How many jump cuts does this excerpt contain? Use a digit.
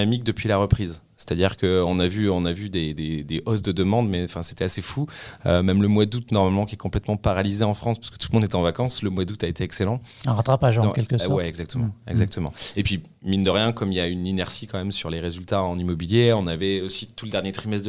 0